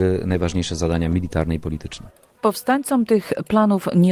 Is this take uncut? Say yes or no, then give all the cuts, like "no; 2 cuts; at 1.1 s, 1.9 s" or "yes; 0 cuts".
no; 1 cut; at 2.4 s